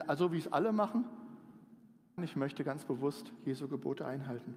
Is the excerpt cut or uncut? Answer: cut